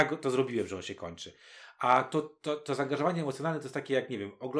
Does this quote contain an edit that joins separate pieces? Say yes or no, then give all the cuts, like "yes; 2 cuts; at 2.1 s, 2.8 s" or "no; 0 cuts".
no; 0 cuts